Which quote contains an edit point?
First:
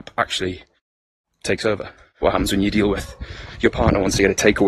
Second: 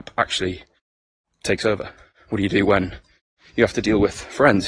first; 1 cut; at 2.2 s

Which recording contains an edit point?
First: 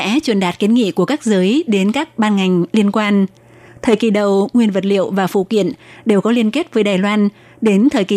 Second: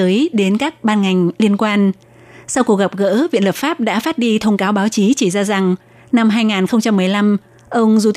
first; 1 cut; at 3.7 s

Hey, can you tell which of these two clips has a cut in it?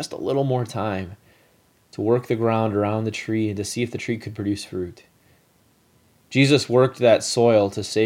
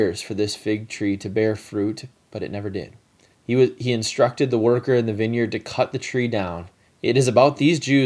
second; 2 cuts; at 3.3 s, 6.9 s

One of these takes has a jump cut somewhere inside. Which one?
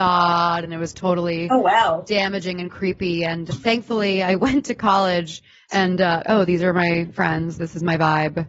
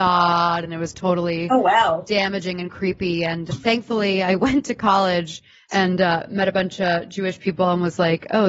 first; 1 cut; at 6.2 s

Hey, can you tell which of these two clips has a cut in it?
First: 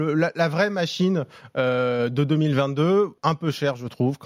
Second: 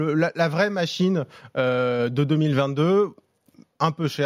first; 1 cut; at 3.2 s

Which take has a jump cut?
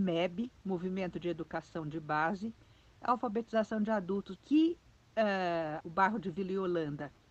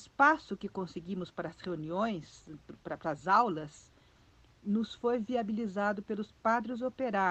first; 3 cuts; at 3.0 s, 4.4 s, 5.8 s

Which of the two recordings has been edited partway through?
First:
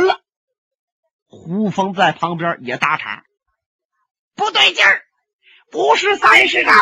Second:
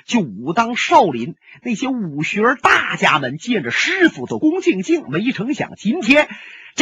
second; 1 cut; at 4.4 s

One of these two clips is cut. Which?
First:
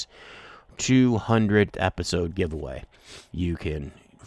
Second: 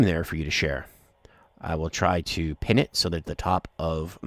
second; 1 cut; at 3.2 s

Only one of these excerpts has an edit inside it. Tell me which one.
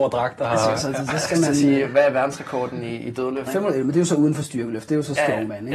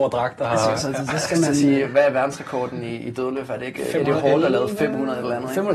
first; 1 cut; at 3.5 s

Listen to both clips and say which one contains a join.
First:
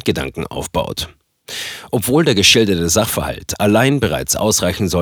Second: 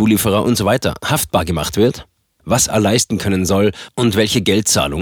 second; 1 cut; at 2.4 s

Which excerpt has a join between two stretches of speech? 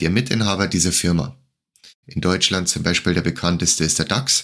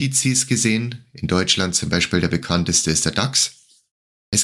first; 1 cut; at 2.0 s

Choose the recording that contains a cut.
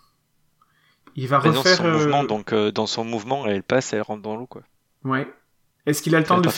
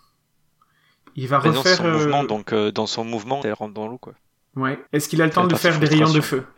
second; 2 cuts; at 3.4 s, 4.9 s

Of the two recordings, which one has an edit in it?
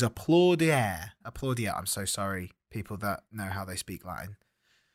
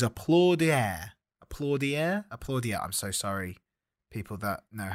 first; 2 cuts; at 1.2 s, 2.6 s

